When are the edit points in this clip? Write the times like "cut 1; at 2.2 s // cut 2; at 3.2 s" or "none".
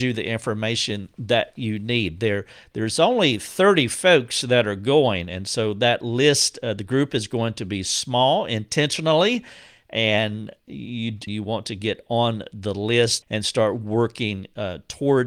cut 1; at 11.3 s // cut 2; at 13.2 s

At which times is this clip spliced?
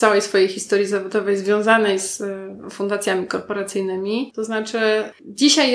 cut 1; at 4.3 s

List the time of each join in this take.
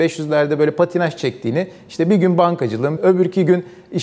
cut 1; at 3.0 s

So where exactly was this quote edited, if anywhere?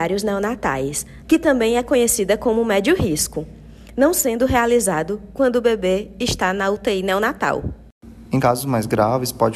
cut 1; at 1.2 s // cut 2; at 8.3 s

